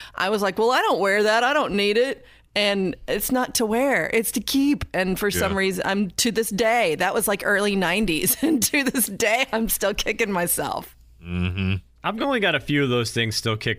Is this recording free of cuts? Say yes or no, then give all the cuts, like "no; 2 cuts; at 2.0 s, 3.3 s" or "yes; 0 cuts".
yes; 0 cuts